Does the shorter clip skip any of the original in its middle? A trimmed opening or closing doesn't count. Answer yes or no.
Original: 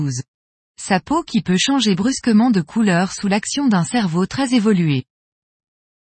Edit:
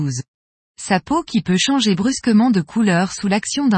no